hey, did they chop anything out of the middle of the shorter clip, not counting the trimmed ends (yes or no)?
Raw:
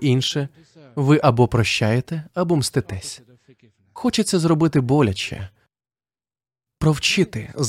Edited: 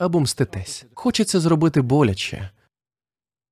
yes